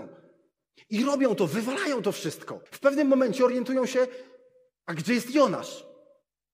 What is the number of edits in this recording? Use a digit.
1